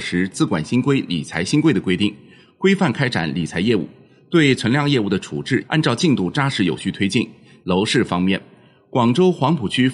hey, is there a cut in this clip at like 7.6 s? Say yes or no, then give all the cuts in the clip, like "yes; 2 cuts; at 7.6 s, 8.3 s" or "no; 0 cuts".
yes; 2 cuts; at 5.7 s, 7.6 s